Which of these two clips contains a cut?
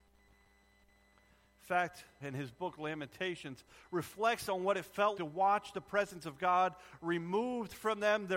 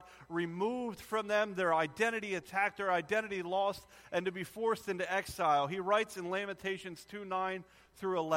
first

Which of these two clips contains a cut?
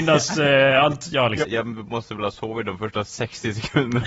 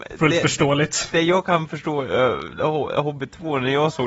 first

